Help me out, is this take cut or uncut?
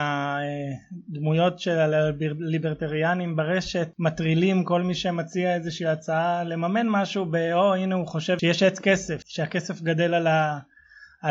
cut